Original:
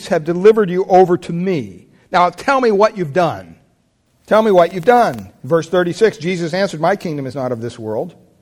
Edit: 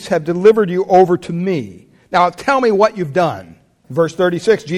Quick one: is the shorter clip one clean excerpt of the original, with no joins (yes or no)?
no